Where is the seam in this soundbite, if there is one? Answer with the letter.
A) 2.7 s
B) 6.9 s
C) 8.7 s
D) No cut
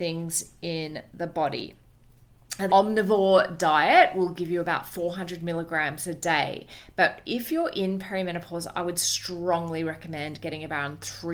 A